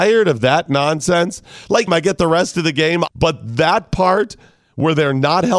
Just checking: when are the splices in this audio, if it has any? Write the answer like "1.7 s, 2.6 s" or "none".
1.9 s, 3.1 s